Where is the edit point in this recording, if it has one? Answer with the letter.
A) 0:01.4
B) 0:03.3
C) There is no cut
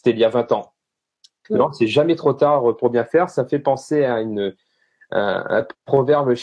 A